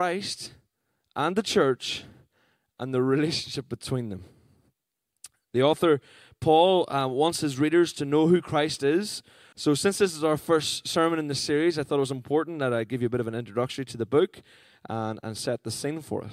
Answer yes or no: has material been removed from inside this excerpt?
yes